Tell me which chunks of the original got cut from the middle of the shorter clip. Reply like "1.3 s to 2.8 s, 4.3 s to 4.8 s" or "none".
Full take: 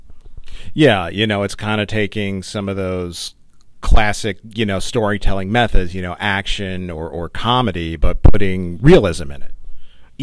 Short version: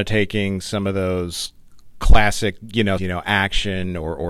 4.8 s to 5.9 s